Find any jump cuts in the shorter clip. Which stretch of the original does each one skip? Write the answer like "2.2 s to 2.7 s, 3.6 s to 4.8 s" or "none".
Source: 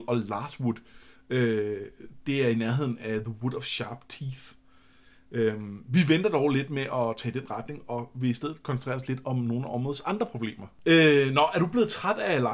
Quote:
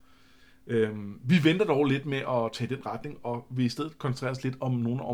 none